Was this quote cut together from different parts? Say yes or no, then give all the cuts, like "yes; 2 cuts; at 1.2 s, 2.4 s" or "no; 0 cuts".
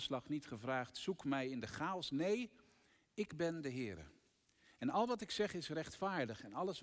no; 0 cuts